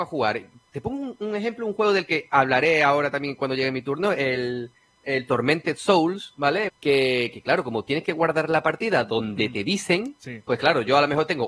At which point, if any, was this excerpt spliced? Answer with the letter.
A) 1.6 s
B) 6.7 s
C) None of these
B